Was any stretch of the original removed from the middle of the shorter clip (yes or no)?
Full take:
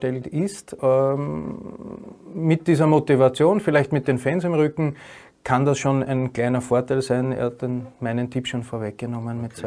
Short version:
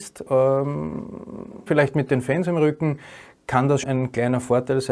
yes